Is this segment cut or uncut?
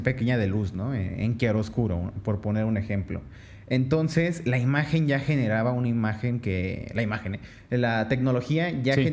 uncut